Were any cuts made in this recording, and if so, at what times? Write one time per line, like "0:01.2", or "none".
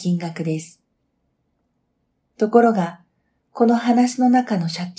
none